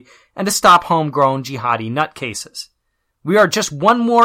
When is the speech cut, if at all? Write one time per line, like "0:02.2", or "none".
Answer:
0:03.1